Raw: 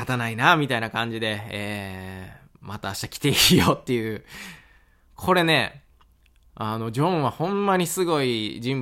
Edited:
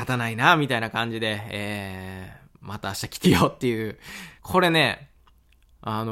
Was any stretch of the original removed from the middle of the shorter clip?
yes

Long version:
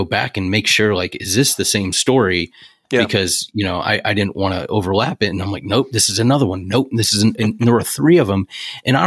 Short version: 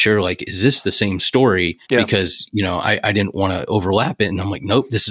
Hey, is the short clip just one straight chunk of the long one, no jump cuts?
no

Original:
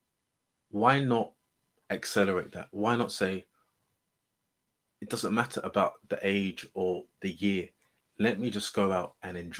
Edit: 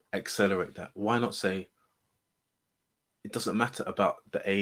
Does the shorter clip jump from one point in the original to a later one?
no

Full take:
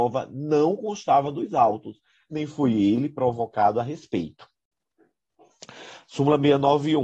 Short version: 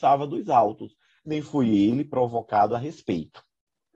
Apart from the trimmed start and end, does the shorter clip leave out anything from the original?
no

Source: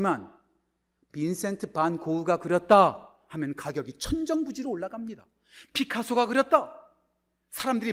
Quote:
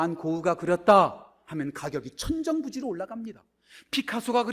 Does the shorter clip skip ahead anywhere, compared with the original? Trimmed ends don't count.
no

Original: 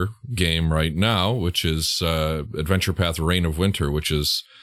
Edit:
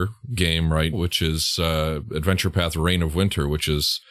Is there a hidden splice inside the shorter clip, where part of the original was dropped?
yes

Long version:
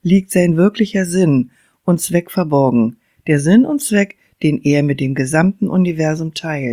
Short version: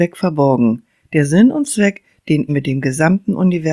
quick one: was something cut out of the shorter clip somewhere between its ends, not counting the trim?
yes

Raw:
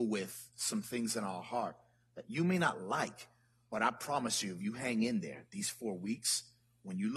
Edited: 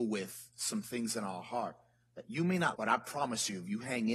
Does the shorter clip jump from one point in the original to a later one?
yes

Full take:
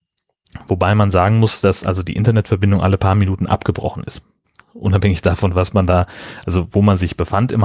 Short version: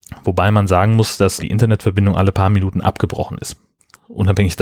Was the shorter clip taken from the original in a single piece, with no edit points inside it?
no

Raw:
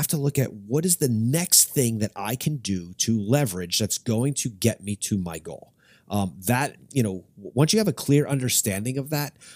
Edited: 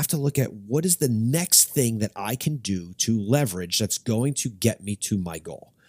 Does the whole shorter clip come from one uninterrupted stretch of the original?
yes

